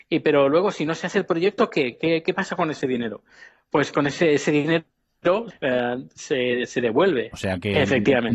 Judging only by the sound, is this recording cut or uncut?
cut